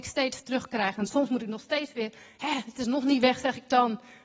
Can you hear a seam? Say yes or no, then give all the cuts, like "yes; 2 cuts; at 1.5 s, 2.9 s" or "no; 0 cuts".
no; 0 cuts